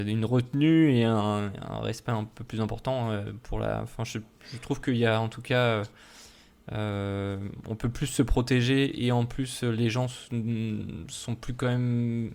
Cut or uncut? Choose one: uncut